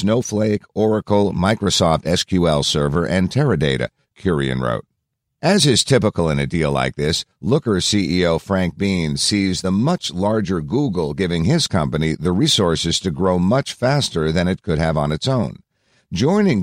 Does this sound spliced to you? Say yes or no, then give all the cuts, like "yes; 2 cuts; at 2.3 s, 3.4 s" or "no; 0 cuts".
no; 0 cuts